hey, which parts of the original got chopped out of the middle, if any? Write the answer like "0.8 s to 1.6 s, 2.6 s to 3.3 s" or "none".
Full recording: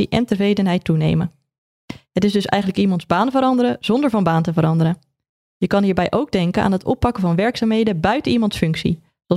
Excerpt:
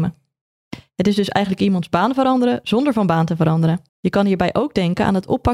5.1 s to 5.5 s